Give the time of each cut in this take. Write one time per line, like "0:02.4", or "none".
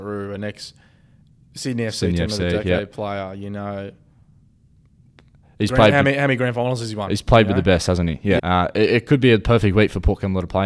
0:08.4